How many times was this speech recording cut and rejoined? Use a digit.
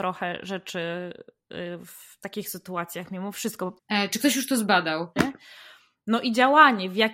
2